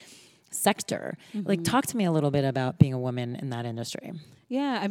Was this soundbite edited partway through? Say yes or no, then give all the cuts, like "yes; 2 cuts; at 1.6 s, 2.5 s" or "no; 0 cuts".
no; 0 cuts